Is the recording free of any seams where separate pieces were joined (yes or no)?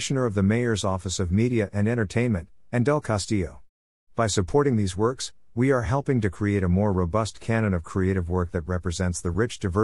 yes